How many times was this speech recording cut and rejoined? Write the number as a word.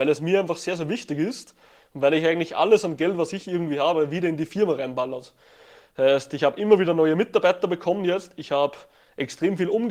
zero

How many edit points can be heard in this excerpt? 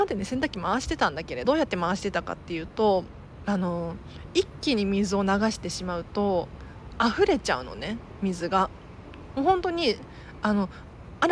one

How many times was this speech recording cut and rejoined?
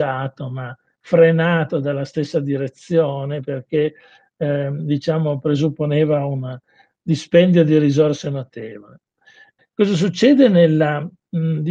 one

